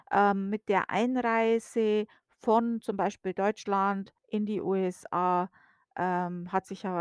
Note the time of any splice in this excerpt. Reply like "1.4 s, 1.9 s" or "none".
4.2 s